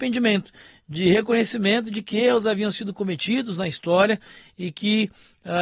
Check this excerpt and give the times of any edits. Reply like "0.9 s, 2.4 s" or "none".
none